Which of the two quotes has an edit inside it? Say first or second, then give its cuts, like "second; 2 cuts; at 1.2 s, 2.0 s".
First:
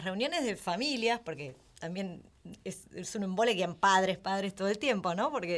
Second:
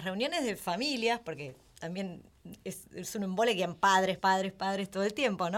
first; 1 cut; at 4.2 s